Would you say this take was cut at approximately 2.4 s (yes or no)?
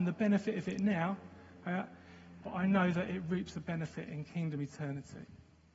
yes